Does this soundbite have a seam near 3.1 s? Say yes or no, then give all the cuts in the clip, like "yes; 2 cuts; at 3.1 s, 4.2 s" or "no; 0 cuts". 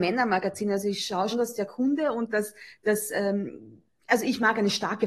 no; 1 cut; at 1.3 s